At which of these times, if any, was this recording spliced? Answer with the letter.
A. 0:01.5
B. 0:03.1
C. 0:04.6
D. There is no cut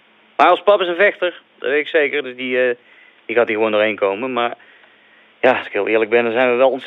D